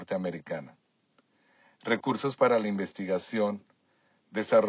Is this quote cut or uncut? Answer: uncut